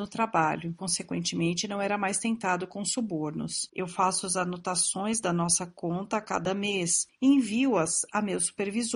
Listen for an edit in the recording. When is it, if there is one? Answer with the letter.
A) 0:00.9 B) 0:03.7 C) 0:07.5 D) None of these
B